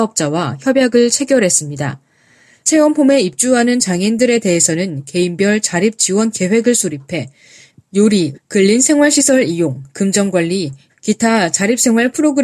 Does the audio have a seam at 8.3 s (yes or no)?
yes